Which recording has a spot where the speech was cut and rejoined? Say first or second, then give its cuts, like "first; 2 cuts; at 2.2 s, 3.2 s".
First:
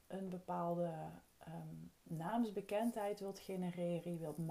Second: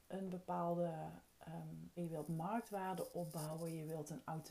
second; 1 cut; at 2.0 s